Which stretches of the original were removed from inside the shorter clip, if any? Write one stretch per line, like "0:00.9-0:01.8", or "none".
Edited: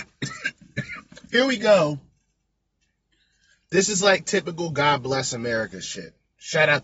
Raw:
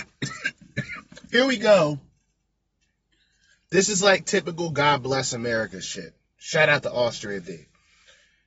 none

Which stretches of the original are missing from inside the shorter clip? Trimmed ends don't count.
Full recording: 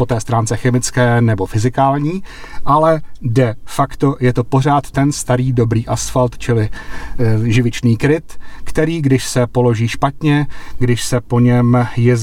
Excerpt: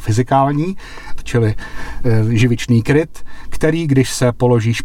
0:02.6-0:06.3

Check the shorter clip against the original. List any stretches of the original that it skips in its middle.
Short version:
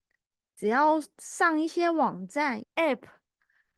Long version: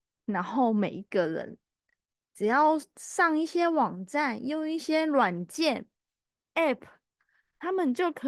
0:04.4-0:06.4

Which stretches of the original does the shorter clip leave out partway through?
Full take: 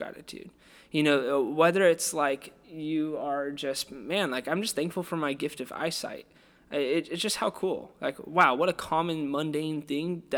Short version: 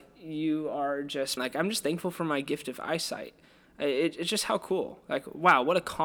0:03.9-0:04.3

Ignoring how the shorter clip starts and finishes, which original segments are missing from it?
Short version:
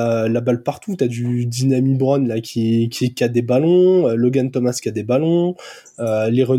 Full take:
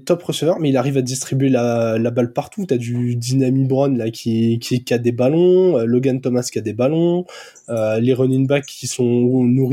none

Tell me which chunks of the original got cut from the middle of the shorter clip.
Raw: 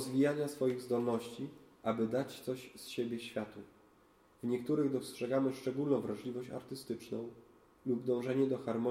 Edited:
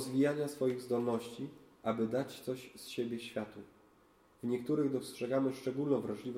none

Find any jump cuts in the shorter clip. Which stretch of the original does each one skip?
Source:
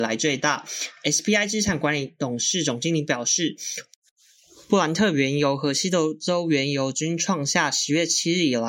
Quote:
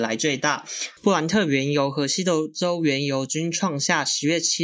0:01.0-0:04.6

